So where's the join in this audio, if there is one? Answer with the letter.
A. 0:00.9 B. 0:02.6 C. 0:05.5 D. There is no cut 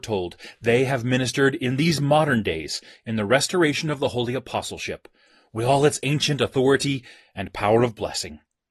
D